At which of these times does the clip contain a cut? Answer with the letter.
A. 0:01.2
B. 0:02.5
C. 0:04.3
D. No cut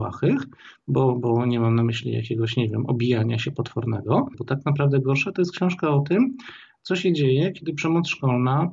C